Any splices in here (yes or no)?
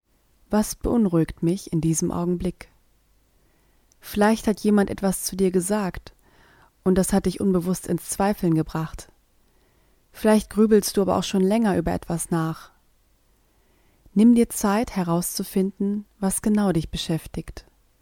no